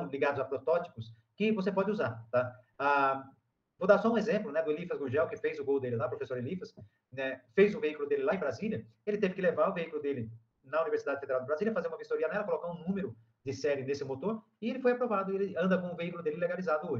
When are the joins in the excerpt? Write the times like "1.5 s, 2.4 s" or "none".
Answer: none